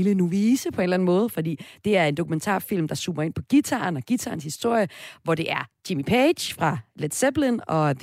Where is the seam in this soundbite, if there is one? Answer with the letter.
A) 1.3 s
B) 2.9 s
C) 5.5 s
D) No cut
D